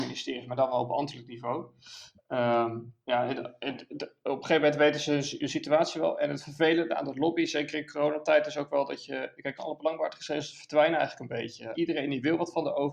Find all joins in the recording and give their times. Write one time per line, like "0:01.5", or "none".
0:09.6
0:11.7